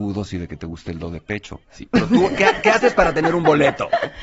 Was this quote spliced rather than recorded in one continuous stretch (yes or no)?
yes